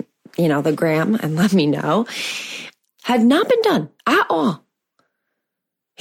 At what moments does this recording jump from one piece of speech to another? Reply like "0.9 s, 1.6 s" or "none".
2.9 s, 4.0 s